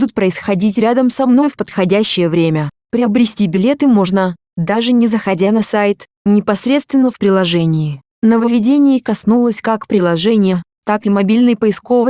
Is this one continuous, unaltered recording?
yes; 0 cuts

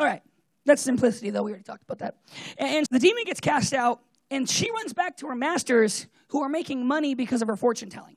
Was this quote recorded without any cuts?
no; 1 cut; at 2.9 s

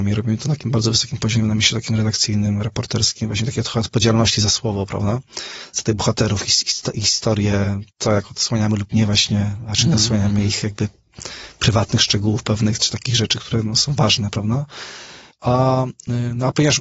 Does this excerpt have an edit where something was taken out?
yes; 2 cuts; at 7.9 s, 15.3 s

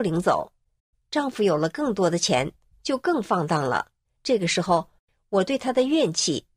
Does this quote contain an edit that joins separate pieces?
yes; 1 cut; at 4.2 s

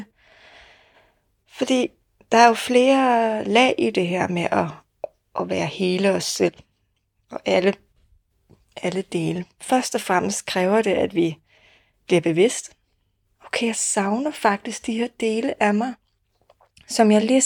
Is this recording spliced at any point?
yes; 1 cut; at 13.2 s

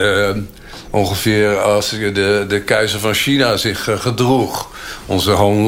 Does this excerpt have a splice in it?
no; 0 cuts

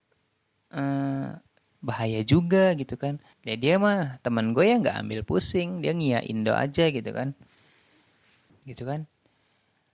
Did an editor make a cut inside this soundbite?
yes; 3 cuts; at 1.7 s, 3.3 s, 8.5 s

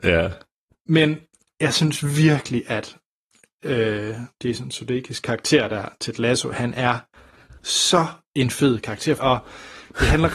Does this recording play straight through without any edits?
no; 2 cuts; at 7.6 s, 9.2 s

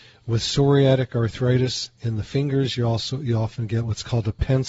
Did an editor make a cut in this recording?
no; 0 cuts

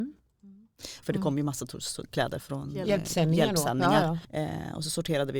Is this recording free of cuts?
no; 3 cuts; at 1.0 s, 2.4 s, 4.2 s

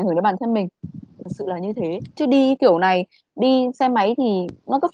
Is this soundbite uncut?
no; 2 cuts; at 1.0 s, 2.2 s

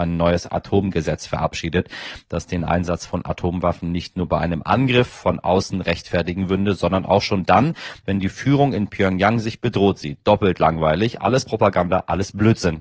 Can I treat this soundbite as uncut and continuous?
yes; 0 cuts

